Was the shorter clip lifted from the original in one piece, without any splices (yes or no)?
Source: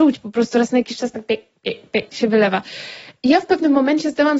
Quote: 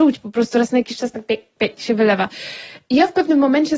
no